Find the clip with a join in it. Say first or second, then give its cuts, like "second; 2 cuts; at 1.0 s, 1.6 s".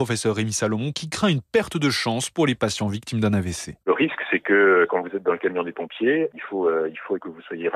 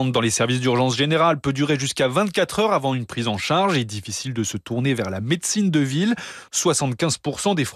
first; 2 cuts; at 0.9 s, 6.3 s